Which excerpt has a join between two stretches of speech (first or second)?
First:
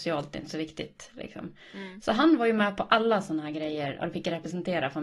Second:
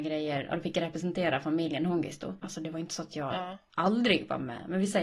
second